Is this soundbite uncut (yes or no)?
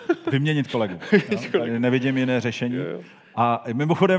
yes